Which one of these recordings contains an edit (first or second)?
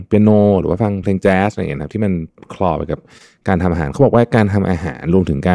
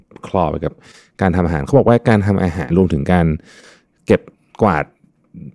second